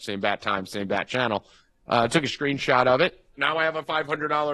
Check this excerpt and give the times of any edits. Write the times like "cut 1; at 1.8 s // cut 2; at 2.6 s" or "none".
cut 1; at 1.8 s // cut 2; at 3.3 s